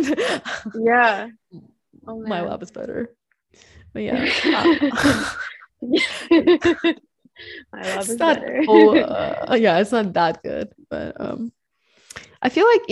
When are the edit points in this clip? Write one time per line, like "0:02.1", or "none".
none